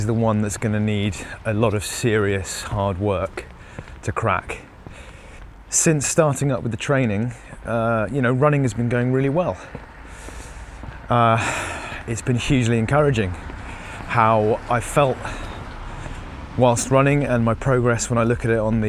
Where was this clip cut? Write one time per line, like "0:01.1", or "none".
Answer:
none